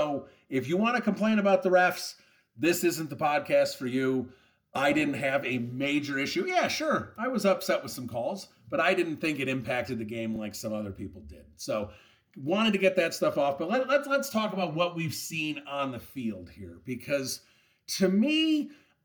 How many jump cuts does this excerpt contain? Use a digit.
0